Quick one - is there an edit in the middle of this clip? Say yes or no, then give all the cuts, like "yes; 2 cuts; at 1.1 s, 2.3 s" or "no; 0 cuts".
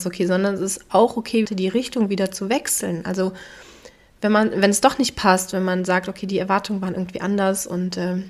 yes; 1 cut; at 1.5 s